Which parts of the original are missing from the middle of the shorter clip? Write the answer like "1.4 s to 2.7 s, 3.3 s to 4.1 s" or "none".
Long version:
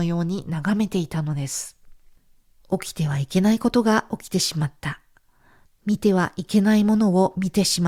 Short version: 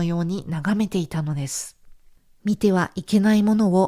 2.4 s to 5.8 s